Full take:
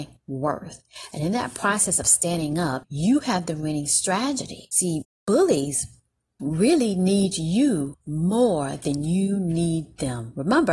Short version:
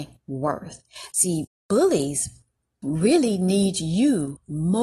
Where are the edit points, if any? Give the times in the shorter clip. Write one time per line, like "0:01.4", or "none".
0:01.1